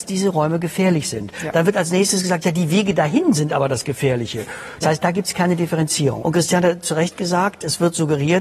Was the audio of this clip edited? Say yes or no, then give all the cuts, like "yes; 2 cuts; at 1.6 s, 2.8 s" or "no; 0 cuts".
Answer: yes; 2 cuts; at 4.8 s, 6.2 s